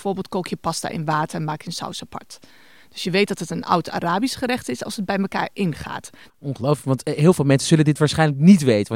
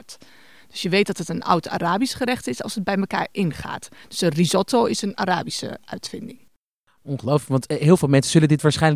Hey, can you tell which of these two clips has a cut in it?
first; 1 cut; at 6.3 s

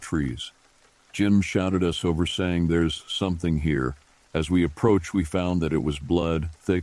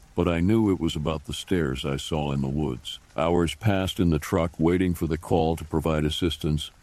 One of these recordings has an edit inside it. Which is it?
second; 1 cut; at 3.1 s

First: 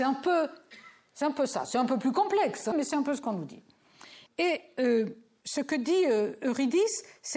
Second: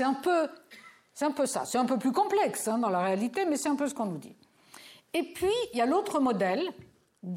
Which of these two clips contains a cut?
first; 2 cuts; at 2.7 s, 4.3 s

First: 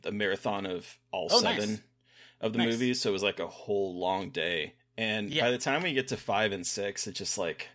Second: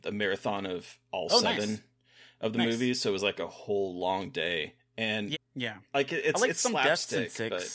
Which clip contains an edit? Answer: second; 1 cut; at 5.3 s

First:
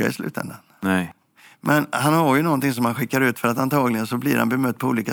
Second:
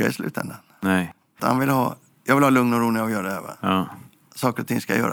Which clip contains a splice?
second; 1 cut; at 1.4 s

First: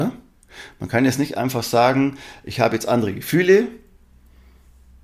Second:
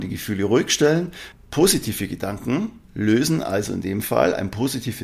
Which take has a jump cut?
second; 2 cuts; at 1.3 s, 2.8 s

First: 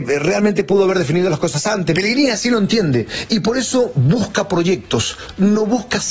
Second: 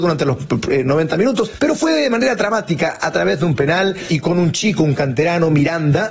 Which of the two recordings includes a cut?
first; 1 cut; at 1.9 s

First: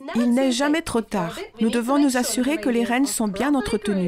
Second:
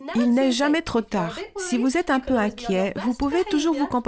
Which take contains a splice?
first; 1 cut; at 1.5 s

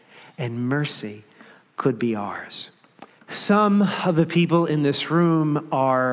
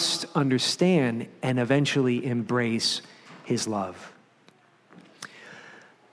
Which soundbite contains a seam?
first; 1 cut; at 3.2 s

